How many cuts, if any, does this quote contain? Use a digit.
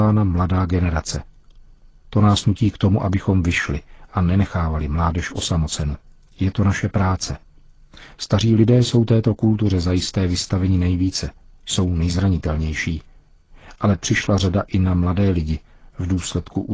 1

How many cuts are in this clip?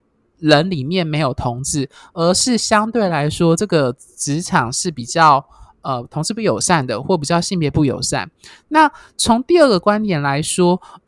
0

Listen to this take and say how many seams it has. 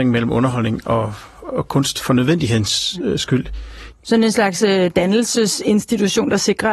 1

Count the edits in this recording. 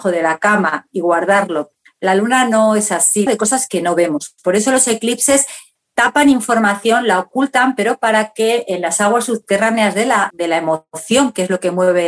2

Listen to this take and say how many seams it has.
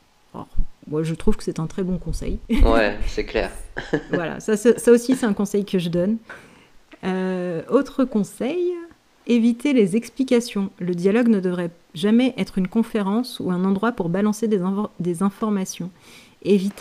1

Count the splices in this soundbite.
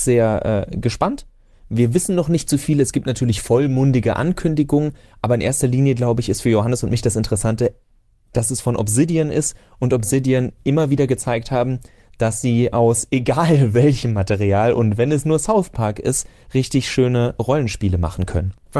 0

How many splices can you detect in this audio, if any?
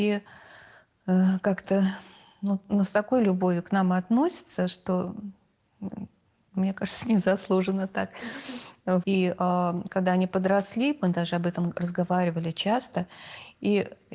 1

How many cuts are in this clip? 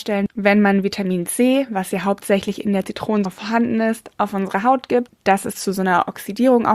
1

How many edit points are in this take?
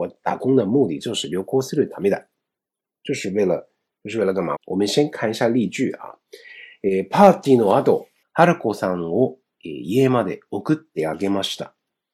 2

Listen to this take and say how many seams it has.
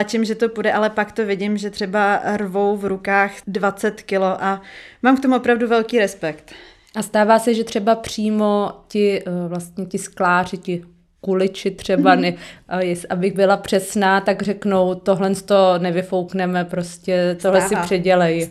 1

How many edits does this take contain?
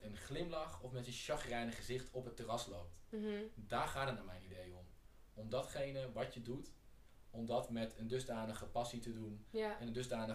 0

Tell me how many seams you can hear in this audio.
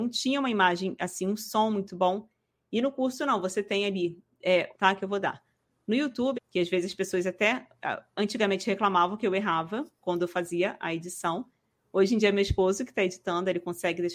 2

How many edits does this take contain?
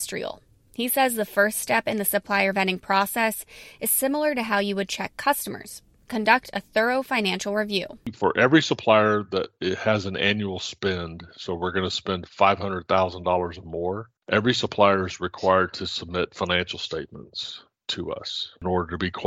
1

